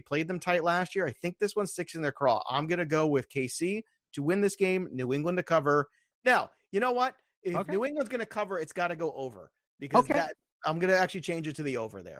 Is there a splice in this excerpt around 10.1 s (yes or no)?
no